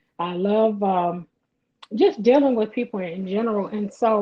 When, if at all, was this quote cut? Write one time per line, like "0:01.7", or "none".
none